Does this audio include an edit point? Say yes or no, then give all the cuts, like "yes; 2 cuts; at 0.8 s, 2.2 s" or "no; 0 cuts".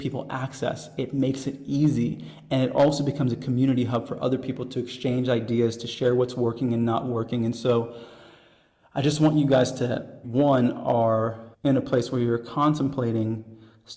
yes; 2 cuts; at 10.2 s, 11.5 s